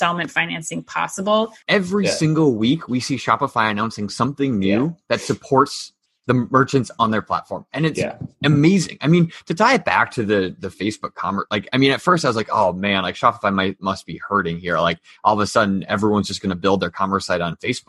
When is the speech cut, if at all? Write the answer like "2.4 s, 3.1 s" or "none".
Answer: 1.6 s

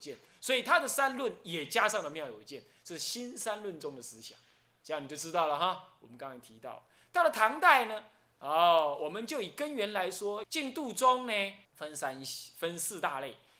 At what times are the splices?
10.4 s, 11.7 s

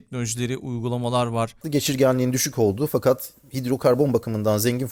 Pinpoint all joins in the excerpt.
1.6 s

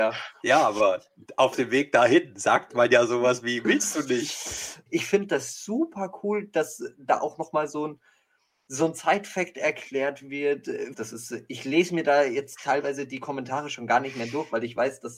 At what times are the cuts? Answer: 4.9 s, 10.9 s

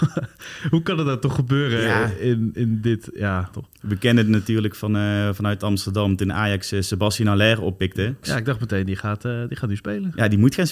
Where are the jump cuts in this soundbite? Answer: 3.5 s, 8.2 s

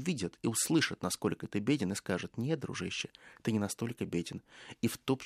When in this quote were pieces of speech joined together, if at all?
none

